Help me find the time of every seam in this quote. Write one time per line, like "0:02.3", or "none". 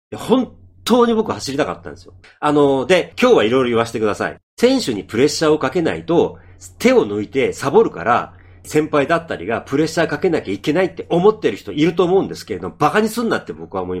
0:02.2
0:08.6